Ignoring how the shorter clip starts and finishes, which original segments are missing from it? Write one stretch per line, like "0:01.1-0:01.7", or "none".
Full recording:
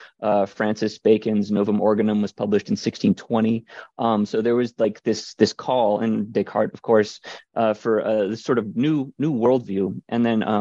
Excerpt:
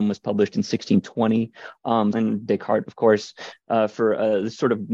0:04.3-0:06.0